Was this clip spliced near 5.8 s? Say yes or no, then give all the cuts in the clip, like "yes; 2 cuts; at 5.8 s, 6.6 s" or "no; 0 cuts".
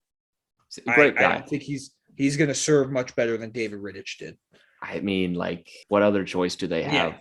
yes; 1 cut; at 5.8 s